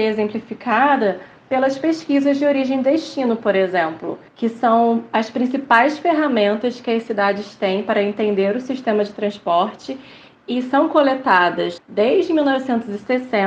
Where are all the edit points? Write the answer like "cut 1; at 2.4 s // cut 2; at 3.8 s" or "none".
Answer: cut 1; at 4.3 s // cut 2; at 11.8 s